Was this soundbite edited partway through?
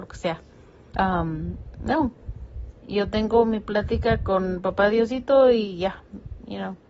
yes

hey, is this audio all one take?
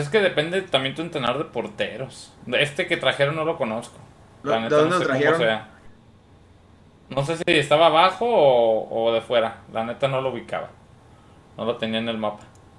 yes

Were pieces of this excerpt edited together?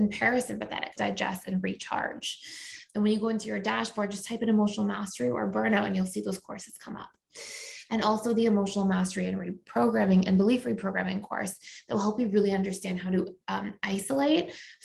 yes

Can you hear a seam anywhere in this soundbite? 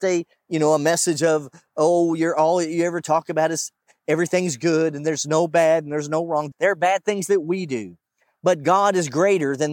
yes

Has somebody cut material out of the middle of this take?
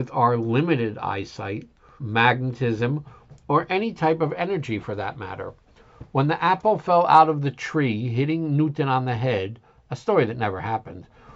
yes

